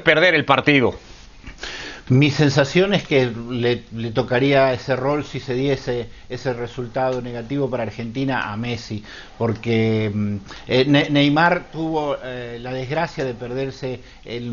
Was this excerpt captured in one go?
yes; 0 cuts

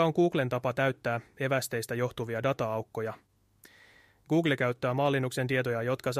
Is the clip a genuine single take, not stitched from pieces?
yes; 0 cuts

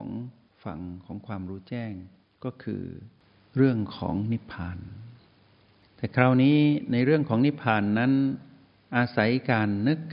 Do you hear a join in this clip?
no; 0 cuts

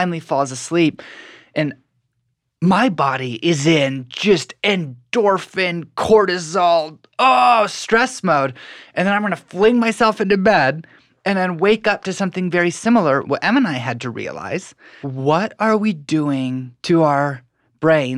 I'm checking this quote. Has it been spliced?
yes; 3 cuts; at 13.2 s, 15.0 s, 16.8 s

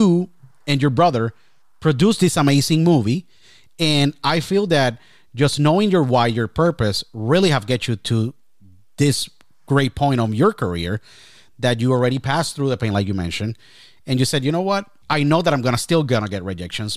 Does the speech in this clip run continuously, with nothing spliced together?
no; 1 cut; at 15.0 s

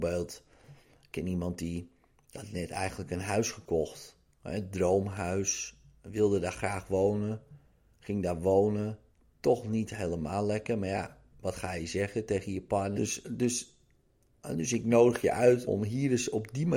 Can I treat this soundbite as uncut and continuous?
no; 2 cuts; at 13.0 s, 15.6 s

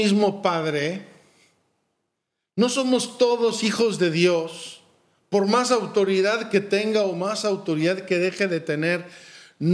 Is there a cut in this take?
no; 0 cuts

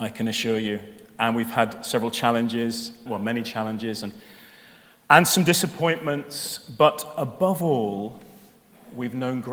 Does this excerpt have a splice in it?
yes; 1 cut; at 3.1 s

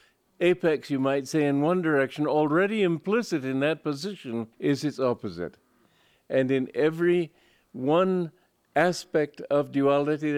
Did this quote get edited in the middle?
yes; 1 cut; at 4.5 s

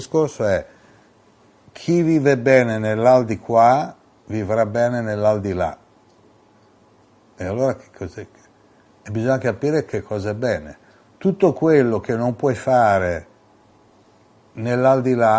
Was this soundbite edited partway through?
no; 0 cuts

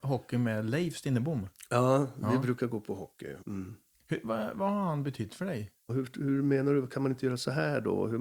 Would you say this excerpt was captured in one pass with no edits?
no; 2 cuts; at 3.4 s, 5.9 s

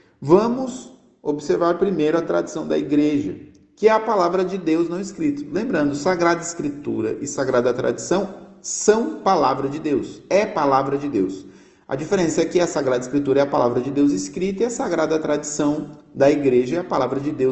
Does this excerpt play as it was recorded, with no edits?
yes; 0 cuts

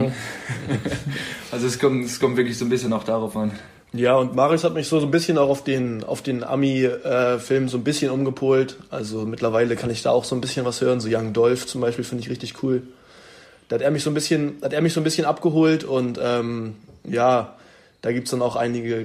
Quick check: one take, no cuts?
yes; 0 cuts

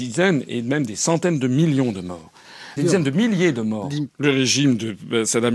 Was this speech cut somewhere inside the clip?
yes; 2 cuts; at 2.8 s, 4.1 s

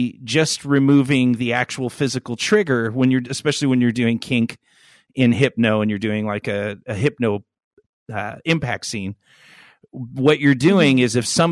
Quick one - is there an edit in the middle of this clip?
no; 0 cuts

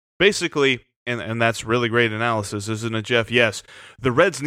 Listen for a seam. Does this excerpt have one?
no; 0 cuts

